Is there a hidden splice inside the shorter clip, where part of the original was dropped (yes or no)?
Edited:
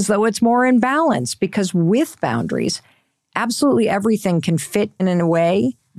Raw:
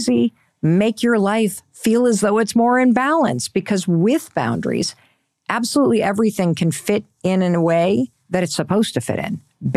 yes